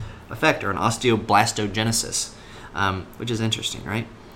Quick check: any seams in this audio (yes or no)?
yes